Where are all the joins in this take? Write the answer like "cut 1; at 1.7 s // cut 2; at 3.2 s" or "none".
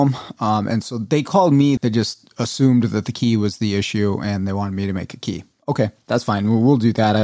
cut 1; at 1.8 s